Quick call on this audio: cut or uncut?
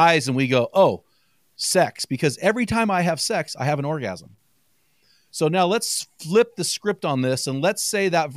uncut